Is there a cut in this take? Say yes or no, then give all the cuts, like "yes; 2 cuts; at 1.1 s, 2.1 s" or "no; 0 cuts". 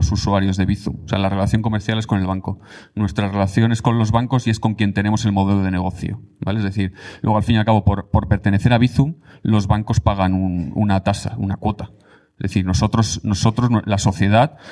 no; 0 cuts